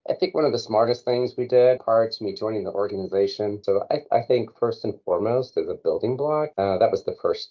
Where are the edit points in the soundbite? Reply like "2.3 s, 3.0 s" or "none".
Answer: 1.8 s, 3.6 s